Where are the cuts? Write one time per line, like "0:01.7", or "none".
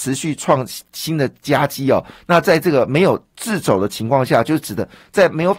none